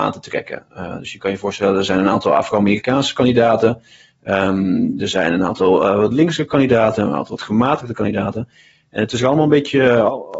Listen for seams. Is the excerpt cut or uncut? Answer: uncut